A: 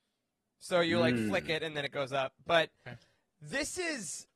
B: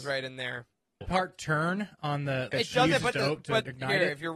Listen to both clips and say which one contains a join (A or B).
B